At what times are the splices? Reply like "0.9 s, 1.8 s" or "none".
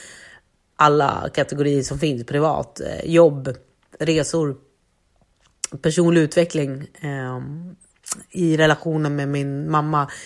none